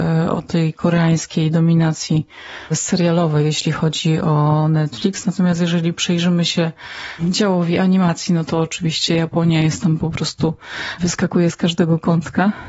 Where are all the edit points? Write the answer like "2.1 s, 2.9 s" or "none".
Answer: none